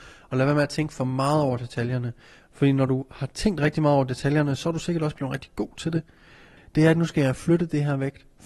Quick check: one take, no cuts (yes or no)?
no